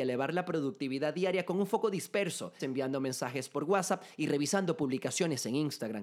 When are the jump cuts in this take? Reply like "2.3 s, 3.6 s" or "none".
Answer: 2.6 s